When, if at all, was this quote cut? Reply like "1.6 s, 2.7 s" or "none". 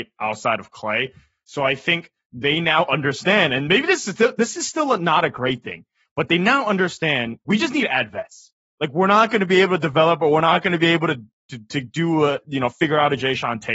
7.4 s